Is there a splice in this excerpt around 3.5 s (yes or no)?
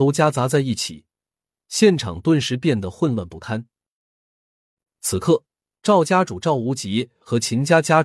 no